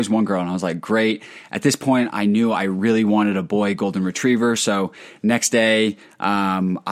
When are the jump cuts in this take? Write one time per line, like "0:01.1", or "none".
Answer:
none

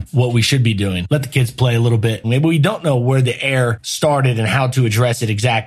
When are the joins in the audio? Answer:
0:01.1
0:02.2

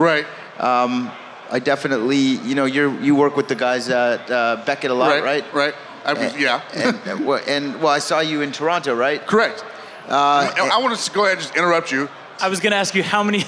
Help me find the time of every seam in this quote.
0:12.4

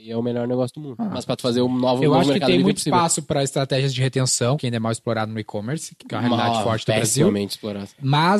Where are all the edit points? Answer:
0:04.6
0:06.0

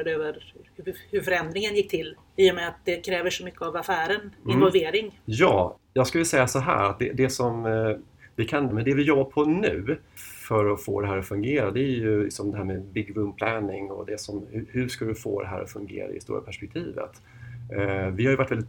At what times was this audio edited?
0:08.7

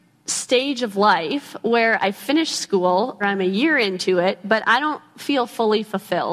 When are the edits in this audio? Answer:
0:03.2

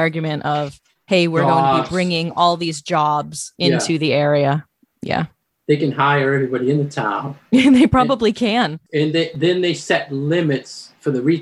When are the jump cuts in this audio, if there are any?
none

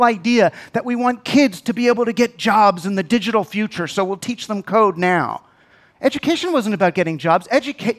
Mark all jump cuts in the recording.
0:05.9

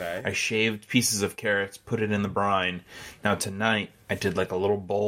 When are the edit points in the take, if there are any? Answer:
none

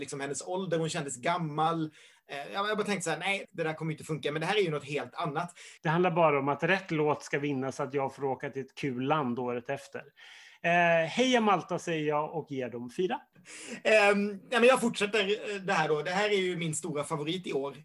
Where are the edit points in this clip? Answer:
0:03.4
0:05.8

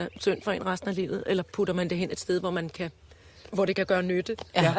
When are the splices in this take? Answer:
0:03.5

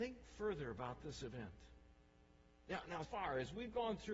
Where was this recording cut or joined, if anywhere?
0:03.0

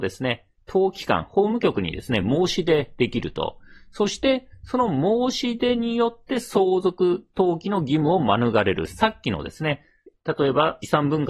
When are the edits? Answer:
none

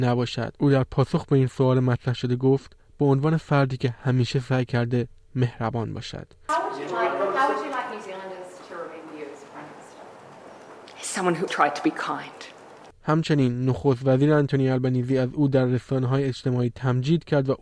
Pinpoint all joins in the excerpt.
0:11.5

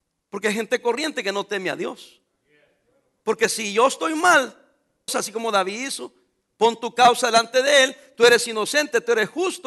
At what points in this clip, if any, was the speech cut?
0:05.1

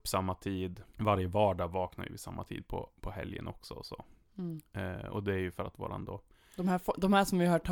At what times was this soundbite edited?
none

